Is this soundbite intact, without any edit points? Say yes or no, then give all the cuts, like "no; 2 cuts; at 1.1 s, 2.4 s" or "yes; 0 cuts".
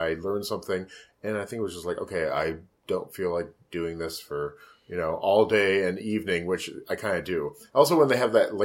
yes; 0 cuts